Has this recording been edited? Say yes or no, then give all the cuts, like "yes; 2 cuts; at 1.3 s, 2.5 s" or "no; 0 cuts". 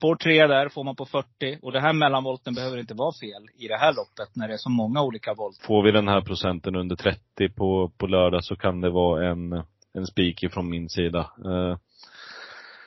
yes; 1 cut; at 5.6 s